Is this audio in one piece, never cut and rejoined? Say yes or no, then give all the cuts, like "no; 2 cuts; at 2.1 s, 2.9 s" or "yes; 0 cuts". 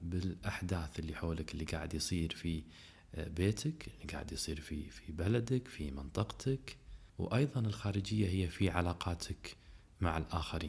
no; 1 cut; at 7.1 s